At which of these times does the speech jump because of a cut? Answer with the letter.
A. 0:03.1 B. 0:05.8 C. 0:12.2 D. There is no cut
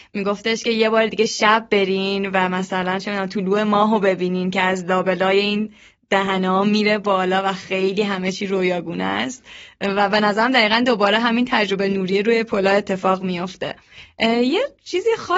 D